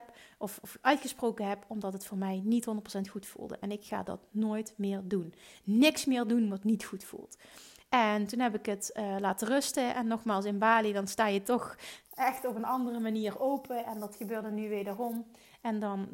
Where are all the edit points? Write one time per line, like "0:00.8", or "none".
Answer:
none

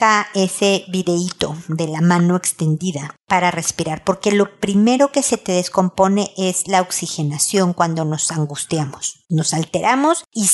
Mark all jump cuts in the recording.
none

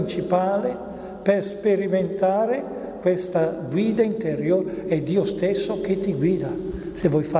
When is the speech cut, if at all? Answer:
none

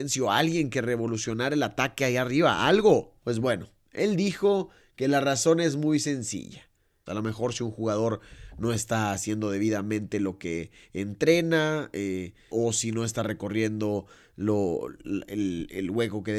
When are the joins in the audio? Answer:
0:03.2
0:07.1
0:12.5

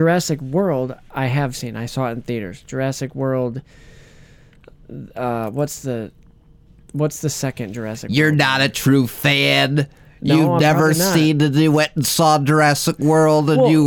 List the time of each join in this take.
none

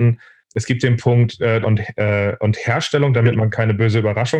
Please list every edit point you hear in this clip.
0:01.6
0:03.1

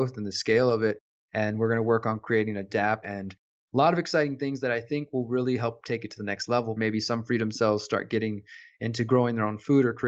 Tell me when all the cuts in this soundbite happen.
0:03.0
0:06.8

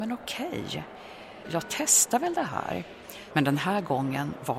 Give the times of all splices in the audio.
0:01.4
0:03.3

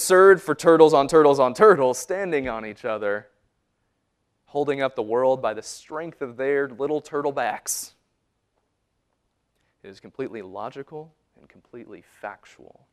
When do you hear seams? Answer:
0:11.3

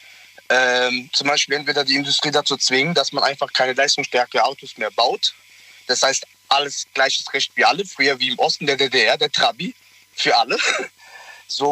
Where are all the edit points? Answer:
none

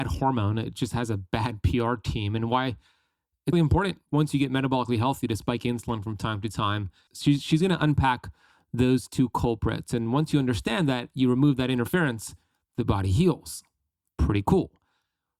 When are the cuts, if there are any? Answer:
0:03.5
0:07.1

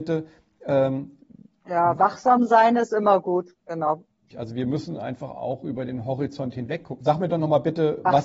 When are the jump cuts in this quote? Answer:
0:04.3
0:07.0

